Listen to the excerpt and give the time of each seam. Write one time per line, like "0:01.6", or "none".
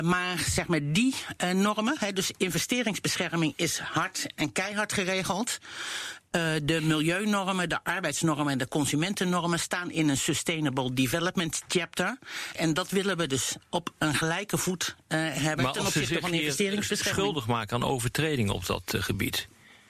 0:12.6